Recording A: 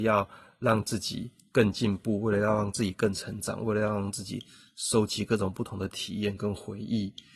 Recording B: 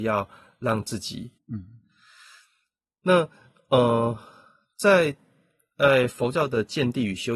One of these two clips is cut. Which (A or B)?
B